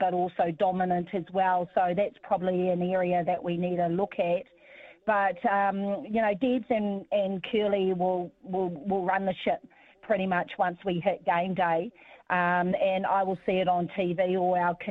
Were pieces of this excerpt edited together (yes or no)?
no